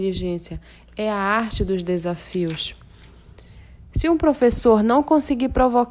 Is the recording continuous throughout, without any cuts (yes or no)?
yes